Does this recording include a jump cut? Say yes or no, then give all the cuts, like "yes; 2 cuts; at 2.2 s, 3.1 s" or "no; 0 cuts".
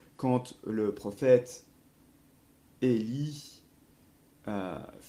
no; 0 cuts